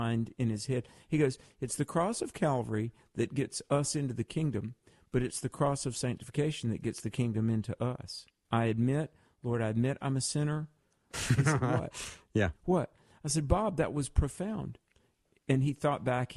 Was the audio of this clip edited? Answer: yes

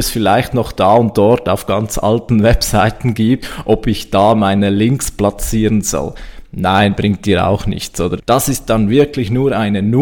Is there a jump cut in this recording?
yes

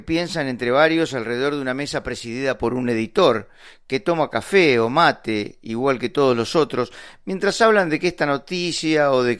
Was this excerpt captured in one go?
yes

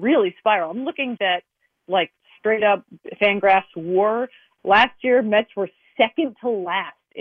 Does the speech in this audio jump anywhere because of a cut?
yes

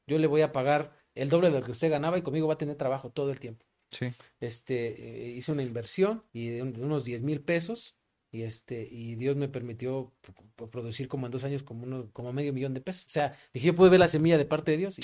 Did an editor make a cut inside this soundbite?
yes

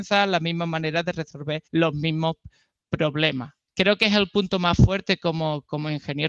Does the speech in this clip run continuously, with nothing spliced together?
no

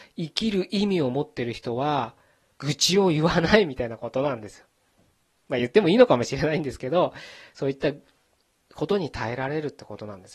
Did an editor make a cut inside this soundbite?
no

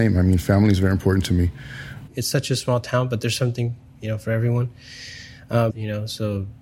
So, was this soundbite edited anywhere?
yes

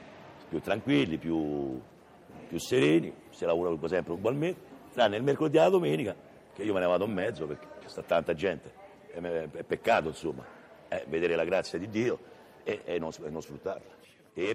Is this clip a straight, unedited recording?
yes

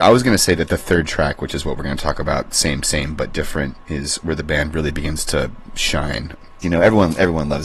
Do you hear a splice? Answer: yes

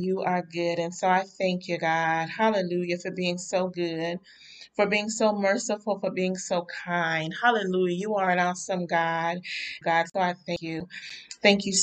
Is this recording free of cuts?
no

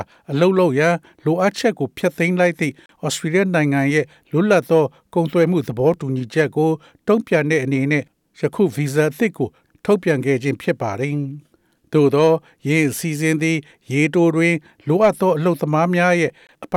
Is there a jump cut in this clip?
no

